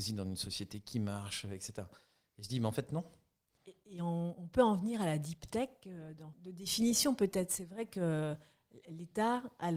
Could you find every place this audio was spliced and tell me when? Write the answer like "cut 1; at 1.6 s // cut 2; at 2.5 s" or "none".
cut 1; at 3.6 s // cut 2; at 6.3 s